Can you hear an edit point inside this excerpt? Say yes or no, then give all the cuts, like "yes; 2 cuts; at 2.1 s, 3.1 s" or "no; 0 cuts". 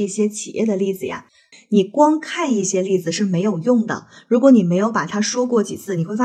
yes; 1 cut; at 1.5 s